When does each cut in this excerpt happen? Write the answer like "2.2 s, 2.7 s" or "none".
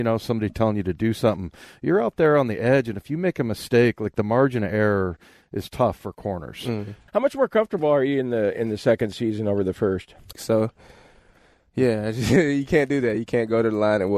7.1 s, 10.3 s